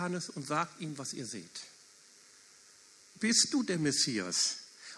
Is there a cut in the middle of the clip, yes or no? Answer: yes